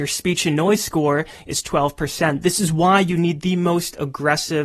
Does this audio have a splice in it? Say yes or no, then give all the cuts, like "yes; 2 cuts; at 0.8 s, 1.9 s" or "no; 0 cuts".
no; 0 cuts